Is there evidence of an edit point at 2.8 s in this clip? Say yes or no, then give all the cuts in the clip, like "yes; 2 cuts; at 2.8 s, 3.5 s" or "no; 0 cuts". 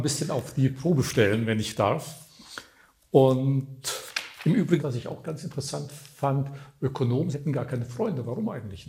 no; 2 cuts; at 4.8 s, 7.3 s